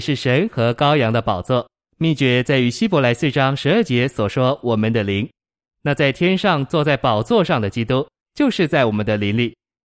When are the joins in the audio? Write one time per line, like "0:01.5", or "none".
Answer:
0:01.9
0:08.2